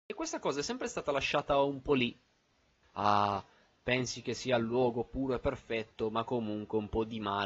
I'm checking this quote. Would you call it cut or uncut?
cut